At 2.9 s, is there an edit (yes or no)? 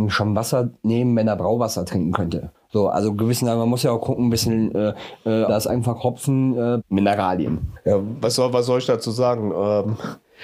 no